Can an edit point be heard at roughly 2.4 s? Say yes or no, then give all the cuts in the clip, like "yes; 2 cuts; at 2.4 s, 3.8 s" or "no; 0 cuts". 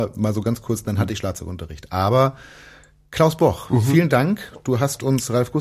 no; 0 cuts